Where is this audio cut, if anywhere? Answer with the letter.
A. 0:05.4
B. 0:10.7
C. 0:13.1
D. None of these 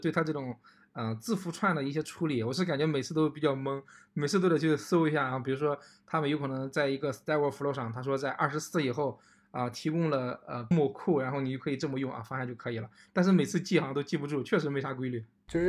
B